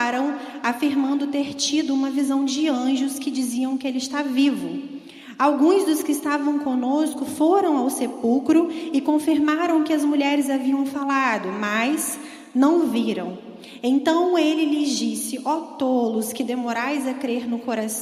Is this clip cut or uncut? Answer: uncut